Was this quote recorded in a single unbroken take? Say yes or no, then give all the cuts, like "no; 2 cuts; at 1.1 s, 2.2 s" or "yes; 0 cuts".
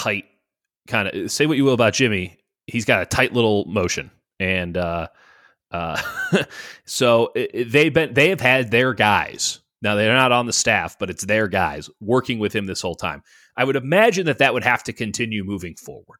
yes; 0 cuts